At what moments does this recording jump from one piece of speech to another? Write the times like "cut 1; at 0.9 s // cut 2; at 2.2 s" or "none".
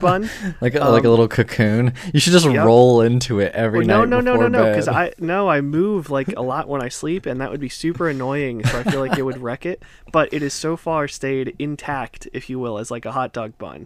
none